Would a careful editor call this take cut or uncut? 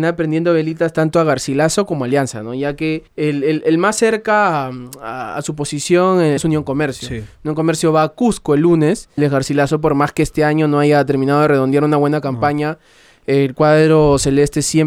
cut